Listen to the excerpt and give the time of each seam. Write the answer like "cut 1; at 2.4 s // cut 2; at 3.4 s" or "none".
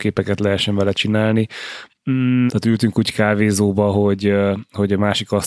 cut 1; at 2.5 s